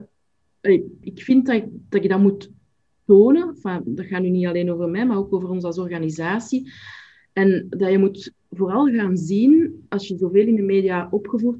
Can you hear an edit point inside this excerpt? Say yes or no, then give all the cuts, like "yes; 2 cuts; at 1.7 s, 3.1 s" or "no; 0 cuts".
yes; 1 cut; at 1.0 s